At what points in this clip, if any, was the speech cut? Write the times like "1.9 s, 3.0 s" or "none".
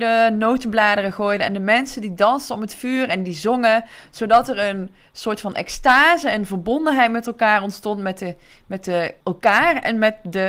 9.2 s

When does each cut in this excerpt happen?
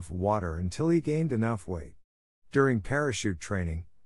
none

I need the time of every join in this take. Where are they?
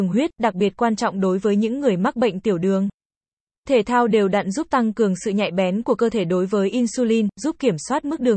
none

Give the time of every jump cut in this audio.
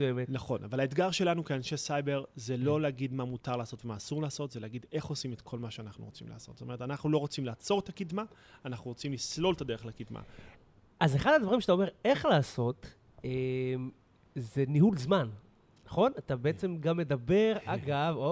none

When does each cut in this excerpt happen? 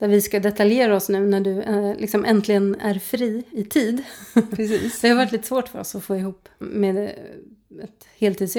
3.5 s, 6.6 s

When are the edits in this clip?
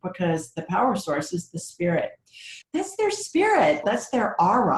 2.6 s, 3.8 s

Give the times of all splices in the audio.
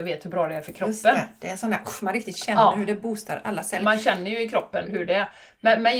4.8 s

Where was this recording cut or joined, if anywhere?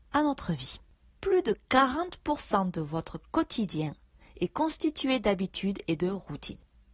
1.1 s

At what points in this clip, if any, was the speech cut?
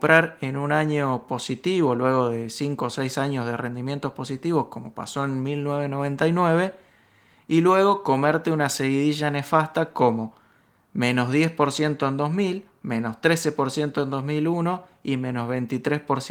none

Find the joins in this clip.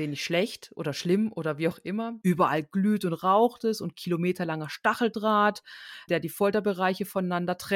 2.2 s, 6.1 s

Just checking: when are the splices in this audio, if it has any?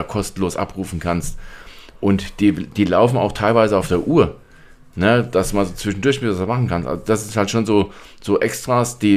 none

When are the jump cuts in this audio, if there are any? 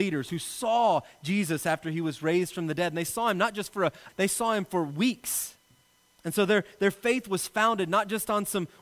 4.1 s

